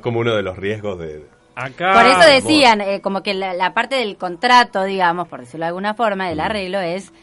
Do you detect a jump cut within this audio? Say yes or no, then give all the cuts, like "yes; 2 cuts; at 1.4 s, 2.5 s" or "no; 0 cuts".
no; 0 cuts